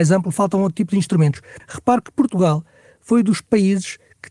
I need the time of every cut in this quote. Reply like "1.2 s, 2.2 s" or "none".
1.6 s